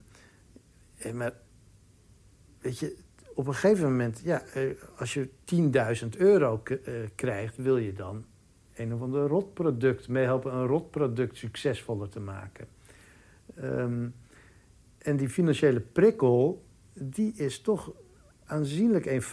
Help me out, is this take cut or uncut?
uncut